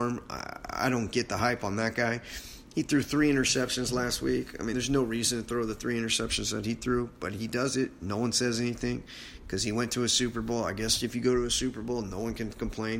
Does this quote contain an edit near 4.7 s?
no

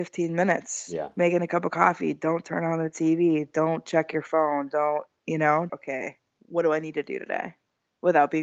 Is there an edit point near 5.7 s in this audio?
yes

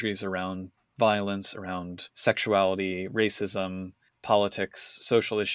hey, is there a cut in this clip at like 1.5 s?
no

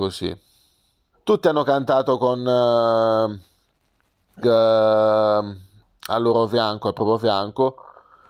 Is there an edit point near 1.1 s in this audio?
yes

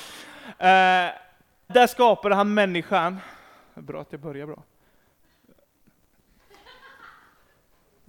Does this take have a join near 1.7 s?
yes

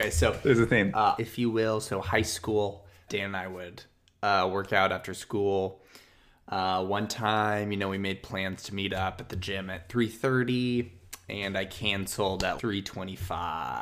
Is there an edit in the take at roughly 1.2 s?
yes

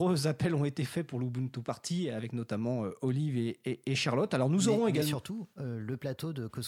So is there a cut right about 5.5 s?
yes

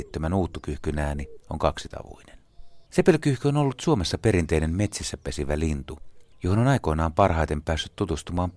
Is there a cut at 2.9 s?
yes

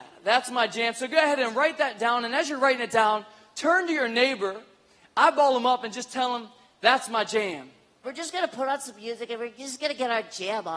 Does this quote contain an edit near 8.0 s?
yes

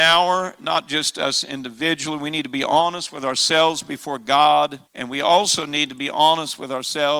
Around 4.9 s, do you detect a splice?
yes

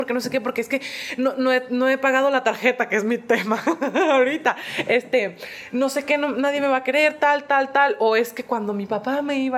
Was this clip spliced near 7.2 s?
no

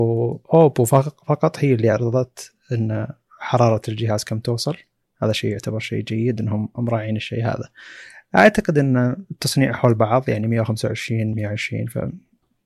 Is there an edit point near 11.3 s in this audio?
yes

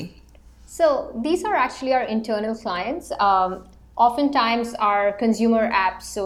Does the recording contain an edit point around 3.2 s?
no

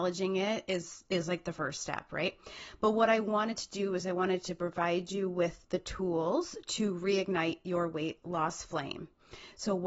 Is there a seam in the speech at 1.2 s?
no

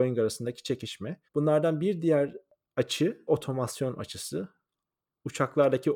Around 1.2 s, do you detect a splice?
yes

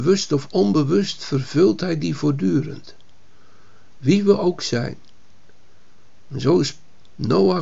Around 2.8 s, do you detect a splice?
no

